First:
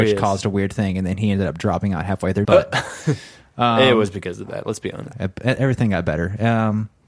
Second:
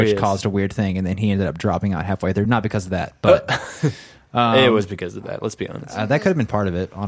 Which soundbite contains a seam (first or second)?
first